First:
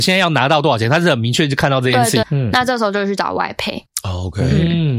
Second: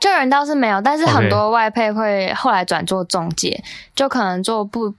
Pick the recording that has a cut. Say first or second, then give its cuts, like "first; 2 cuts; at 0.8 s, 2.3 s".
first; 1 cut; at 2.2 s